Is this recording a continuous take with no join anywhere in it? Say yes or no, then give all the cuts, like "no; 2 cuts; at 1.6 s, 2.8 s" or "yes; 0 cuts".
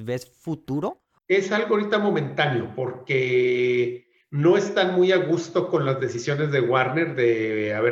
no; 1 cut; at 1.2 s